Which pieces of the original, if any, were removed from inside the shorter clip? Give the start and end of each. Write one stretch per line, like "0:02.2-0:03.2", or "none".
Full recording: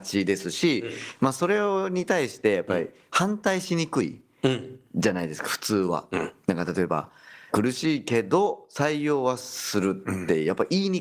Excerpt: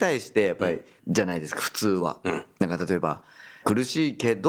0:03.1-0:04.9